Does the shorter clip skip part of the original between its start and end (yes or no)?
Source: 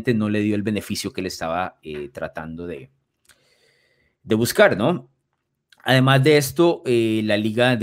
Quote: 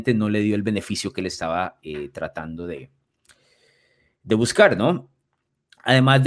no